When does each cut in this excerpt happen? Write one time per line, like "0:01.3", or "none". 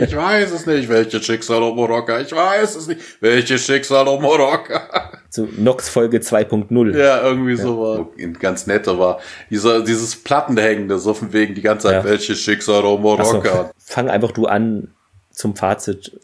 0:08.0
0:13.7